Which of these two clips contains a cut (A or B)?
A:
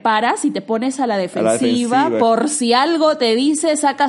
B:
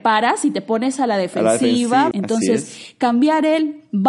B